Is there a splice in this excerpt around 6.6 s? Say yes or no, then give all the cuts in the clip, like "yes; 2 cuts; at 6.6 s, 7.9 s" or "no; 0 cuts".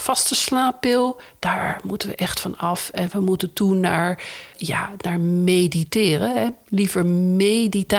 no; 1 cut; at 4.5 s